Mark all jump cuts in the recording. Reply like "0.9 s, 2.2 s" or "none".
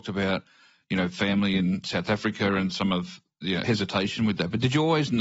none